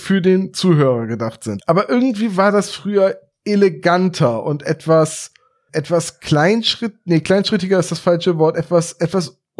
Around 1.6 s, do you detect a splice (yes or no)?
yes